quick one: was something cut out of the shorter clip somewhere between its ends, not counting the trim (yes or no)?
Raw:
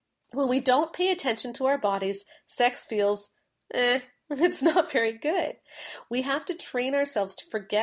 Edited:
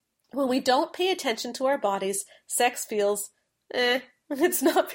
no